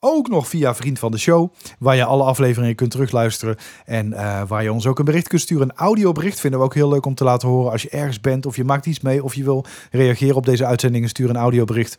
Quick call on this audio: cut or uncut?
uncut